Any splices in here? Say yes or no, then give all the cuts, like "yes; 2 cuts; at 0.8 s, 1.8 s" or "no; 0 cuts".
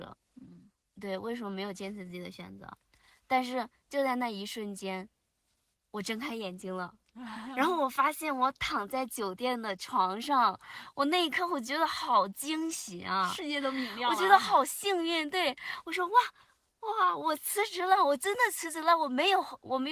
no; 0 cuts